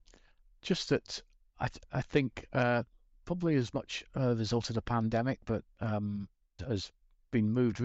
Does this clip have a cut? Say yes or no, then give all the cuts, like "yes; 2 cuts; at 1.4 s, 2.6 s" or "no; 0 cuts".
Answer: yes; 1 cut; at 6.6 s